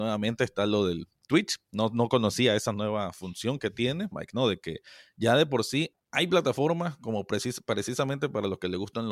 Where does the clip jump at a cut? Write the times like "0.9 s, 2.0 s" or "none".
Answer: 4.1 s, 5.9 s